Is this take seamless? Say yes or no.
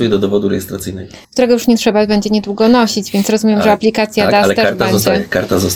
no